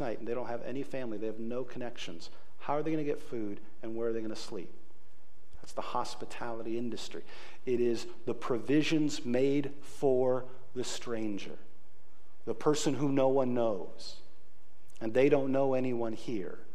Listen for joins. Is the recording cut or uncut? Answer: cut